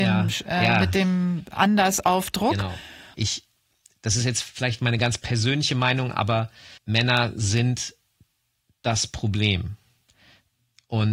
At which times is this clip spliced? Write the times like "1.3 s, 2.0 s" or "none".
3.1 s, 6.8 s